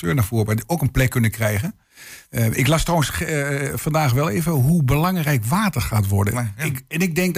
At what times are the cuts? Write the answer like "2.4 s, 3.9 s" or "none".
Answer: 2.2 s, 6.3 s